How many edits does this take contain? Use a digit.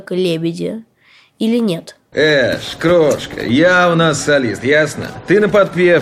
1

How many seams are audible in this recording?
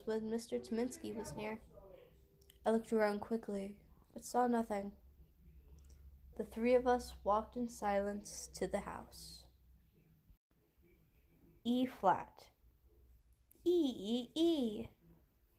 1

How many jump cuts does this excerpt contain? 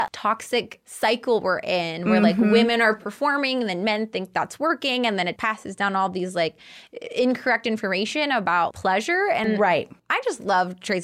2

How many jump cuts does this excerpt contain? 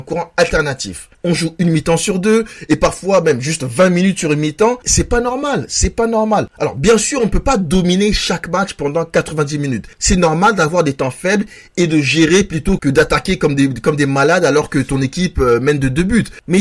1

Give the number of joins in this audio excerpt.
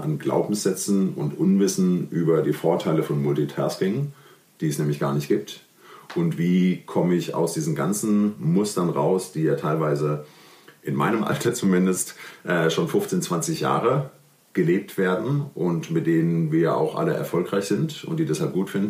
0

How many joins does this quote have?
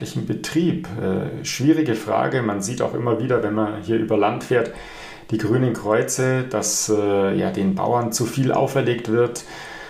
0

